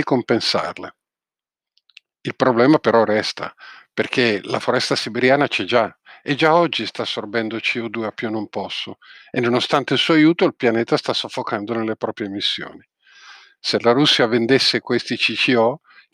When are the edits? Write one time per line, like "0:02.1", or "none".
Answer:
none